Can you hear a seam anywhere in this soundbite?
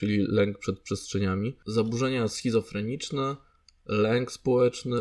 no; 0 cuts

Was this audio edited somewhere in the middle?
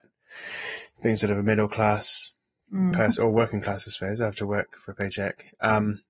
no; 0 cuts

